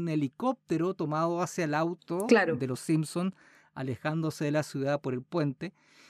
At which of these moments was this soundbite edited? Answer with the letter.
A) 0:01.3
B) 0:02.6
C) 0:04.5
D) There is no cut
D